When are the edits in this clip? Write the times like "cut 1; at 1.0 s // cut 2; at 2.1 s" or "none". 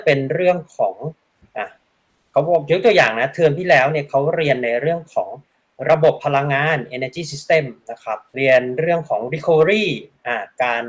cut 1; at 8.3 s

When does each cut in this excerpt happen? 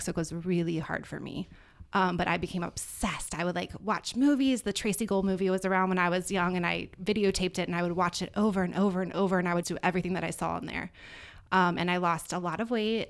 cut 1; at 9.6 s

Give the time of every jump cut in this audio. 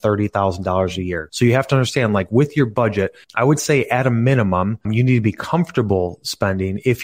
cut 1; at 3.2 s // cut 2; at 4.8 s

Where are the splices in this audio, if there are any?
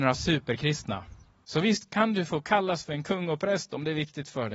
cut 1; at 1.4 s

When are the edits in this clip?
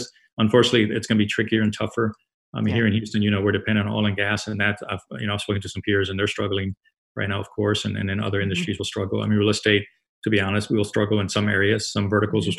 none

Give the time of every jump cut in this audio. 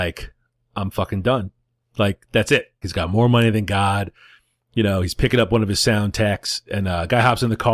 cut 1; at 2.8 s

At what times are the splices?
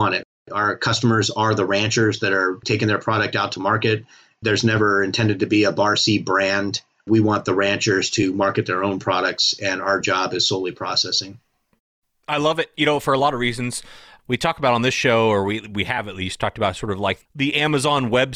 cut 1; at 7.0 s

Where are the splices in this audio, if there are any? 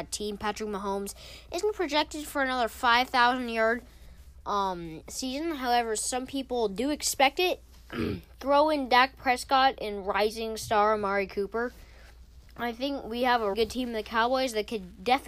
cut 1; at 7.7 s // cut 2; at 12.5 s // cut 3; at 13.5 s

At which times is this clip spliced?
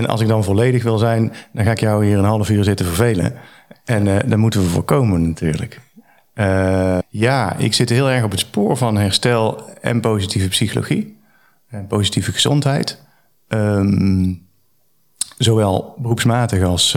cut 1; at 7.0 s

